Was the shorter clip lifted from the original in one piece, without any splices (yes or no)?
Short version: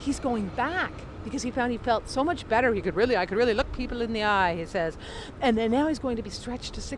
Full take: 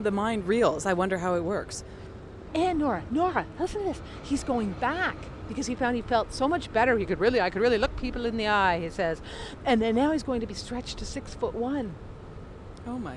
yes